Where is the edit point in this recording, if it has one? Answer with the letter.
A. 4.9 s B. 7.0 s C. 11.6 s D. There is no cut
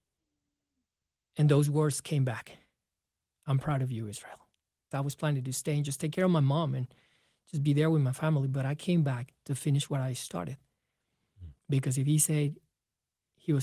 A